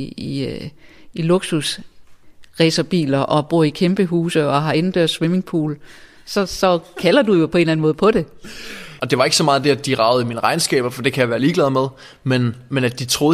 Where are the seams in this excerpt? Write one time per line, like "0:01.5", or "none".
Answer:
0:09.0

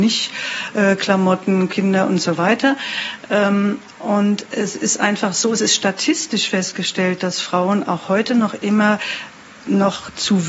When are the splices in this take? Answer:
0:01.7

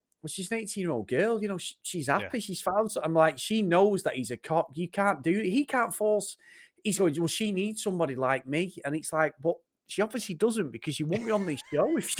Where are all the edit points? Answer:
none

